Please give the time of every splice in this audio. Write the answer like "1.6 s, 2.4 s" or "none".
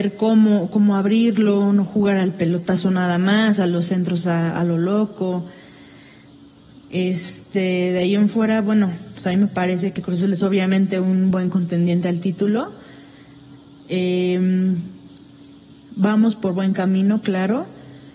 none